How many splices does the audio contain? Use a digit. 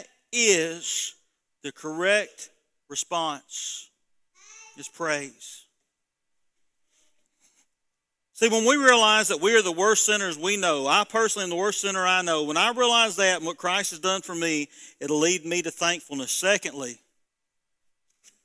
0